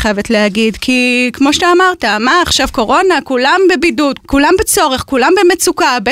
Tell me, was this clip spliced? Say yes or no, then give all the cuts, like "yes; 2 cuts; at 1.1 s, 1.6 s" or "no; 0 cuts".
yes; 1 cut; at 4.2 s